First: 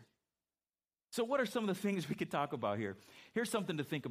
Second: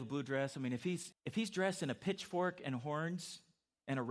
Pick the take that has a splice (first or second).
second